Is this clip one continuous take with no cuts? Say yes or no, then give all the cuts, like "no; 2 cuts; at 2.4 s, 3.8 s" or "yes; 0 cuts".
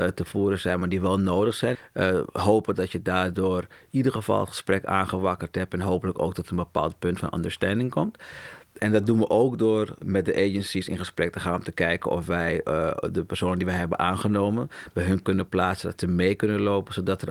yes; 0 cuts